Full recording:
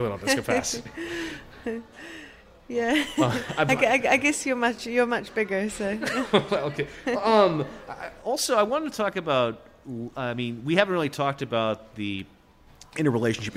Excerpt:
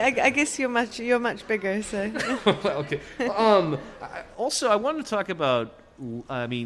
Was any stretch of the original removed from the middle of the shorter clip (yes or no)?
no